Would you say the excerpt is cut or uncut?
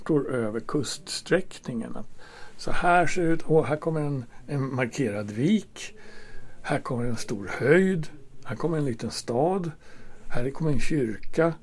uncut